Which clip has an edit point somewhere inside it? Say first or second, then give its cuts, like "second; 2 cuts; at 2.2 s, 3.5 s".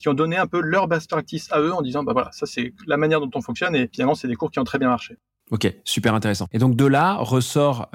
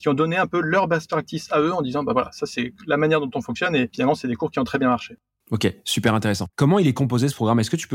second; 1 cut; at 6.5 s